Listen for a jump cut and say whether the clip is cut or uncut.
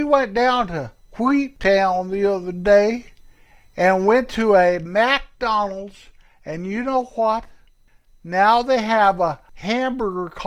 uncut